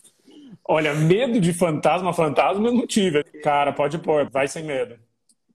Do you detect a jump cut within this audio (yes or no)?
yes